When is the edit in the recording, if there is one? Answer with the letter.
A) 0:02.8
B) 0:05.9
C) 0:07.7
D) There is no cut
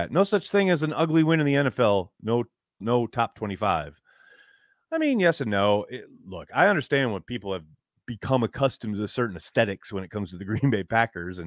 A